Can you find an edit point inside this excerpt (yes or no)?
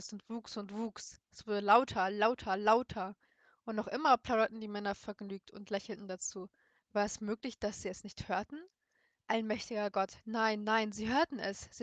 no